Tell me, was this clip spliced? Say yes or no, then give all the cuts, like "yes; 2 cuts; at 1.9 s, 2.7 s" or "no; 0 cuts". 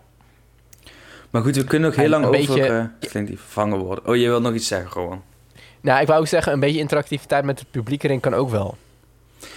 yes; 1 cut; at 3.0 s